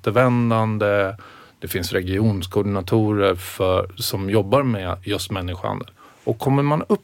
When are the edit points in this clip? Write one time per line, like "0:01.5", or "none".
none

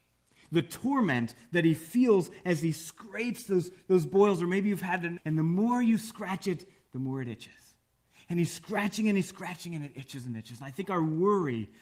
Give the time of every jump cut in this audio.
0:05.2

